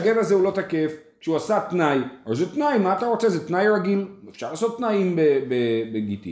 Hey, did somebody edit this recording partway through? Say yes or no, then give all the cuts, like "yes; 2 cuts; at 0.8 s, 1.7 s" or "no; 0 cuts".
no; 0 cuts